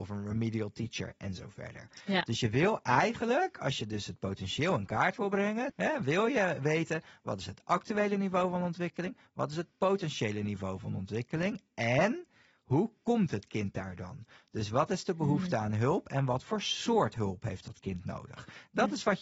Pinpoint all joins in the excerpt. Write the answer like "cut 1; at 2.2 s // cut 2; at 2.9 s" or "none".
cut 1; at 5.7 s